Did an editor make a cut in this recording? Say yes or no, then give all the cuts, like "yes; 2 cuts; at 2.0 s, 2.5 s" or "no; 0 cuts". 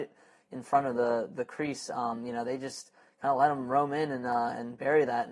no; 0 cuts